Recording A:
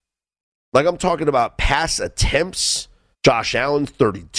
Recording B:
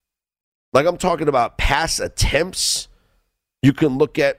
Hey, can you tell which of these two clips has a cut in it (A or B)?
A